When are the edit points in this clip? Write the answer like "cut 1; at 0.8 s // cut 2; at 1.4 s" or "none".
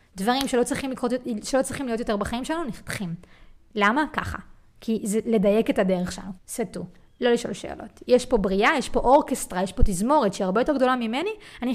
cut 1; at 6.4 s